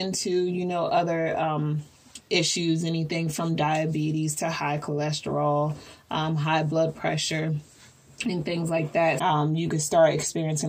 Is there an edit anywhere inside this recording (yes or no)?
yes